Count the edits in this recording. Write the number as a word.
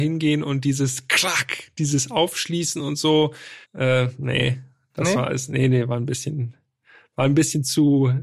one